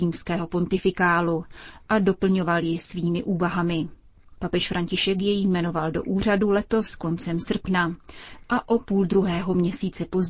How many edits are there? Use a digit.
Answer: 1